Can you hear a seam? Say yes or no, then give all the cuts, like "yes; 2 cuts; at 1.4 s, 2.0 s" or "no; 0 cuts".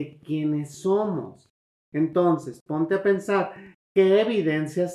yes; 1 cut; at 1.7 s